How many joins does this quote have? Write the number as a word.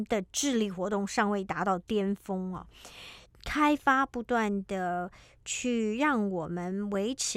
one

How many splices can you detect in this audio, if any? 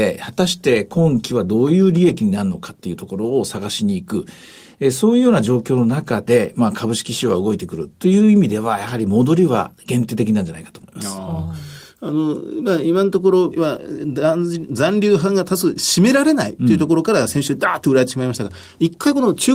one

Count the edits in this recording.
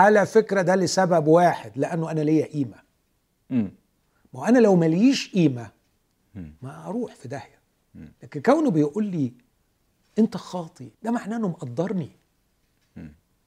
two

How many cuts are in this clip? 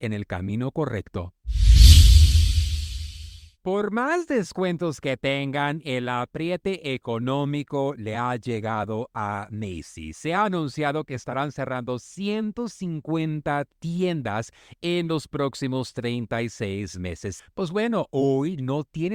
two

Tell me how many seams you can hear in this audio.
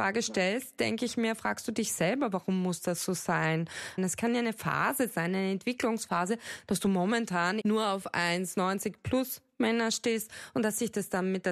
two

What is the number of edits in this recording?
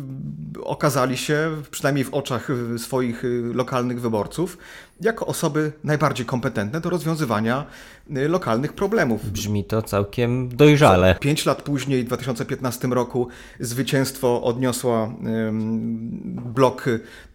one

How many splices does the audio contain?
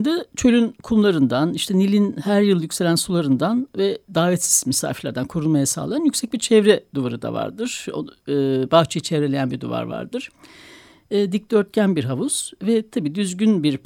zero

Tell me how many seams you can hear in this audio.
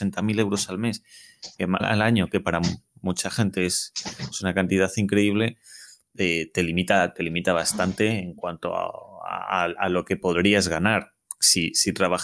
one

